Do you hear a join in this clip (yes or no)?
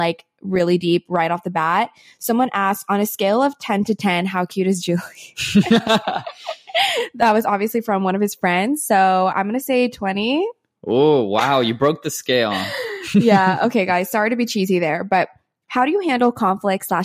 no